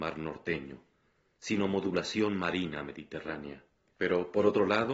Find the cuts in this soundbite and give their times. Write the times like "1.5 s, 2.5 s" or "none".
3.9 s